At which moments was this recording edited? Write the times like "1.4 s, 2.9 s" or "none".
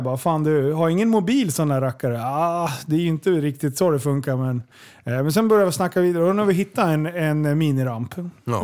none